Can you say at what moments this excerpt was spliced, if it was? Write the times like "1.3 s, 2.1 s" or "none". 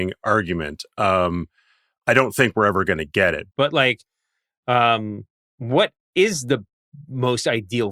3.5 s